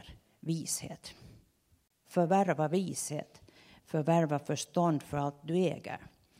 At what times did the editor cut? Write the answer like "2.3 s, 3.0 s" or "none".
2.0 s